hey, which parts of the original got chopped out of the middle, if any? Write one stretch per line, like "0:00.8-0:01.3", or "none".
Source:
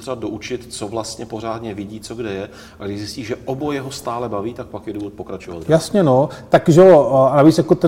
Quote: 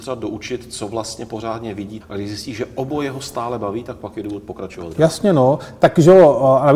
0:02.0-0:02.7